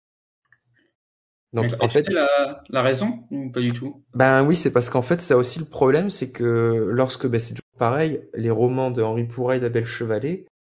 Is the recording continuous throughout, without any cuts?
yes; 0 cuts

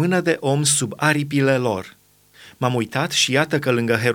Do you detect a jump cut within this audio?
no; 0 cuts

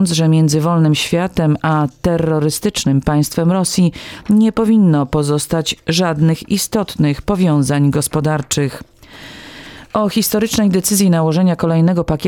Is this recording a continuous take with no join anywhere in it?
yes; 0 cuts

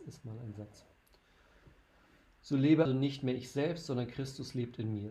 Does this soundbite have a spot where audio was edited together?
yes; 1 cut; at 2.9 s

